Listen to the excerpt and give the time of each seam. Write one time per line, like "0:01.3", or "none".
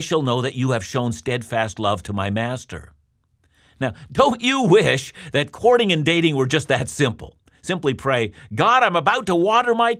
none